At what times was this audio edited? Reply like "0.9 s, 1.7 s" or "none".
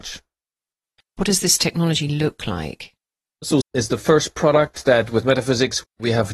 1.0 s, 3.6 s